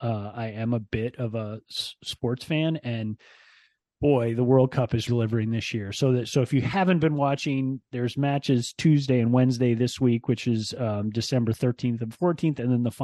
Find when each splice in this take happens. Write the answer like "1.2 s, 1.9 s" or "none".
5.1 s